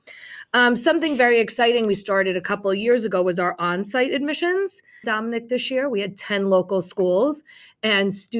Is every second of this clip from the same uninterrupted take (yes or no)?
no